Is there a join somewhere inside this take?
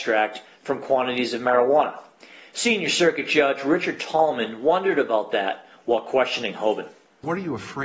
no; 0 cuts

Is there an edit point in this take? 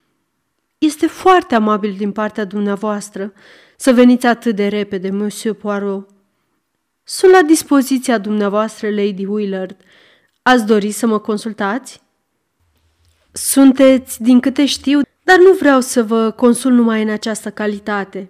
yes; 1 cut; at 15.0 s

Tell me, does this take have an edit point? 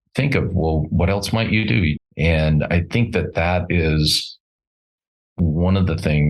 yes; 1 cut; at 2.0 s

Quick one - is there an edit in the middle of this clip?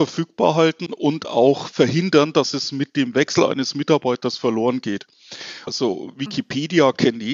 yes; 1 cut; at 5.7 s

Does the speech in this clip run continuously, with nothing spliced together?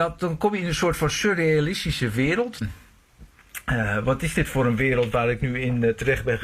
no; 1 cut; at 2.6 s

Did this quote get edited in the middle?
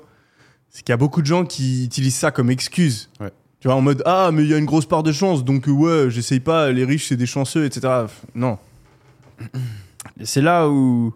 yes; 1 cut; at 10.1 s

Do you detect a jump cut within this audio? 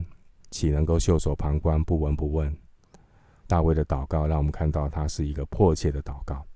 yes; 1 cut; at 3.5 s

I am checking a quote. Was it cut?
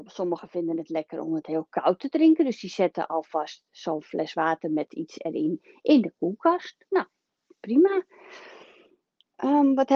no; 0 cuts

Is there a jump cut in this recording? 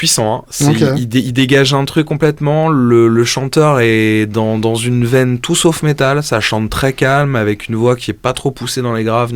no; 0 cuts

